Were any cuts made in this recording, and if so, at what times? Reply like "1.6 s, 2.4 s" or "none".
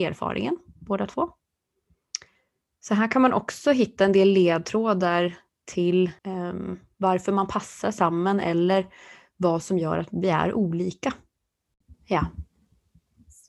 6.2 s, 11.9 s